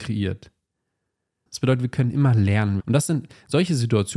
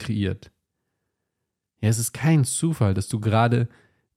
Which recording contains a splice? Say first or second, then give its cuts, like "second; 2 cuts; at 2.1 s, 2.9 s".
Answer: first; 2 cuts; at 1.5 s, 2.8 s